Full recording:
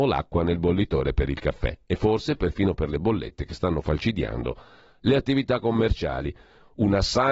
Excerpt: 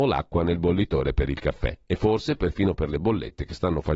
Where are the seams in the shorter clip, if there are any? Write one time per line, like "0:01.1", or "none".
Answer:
none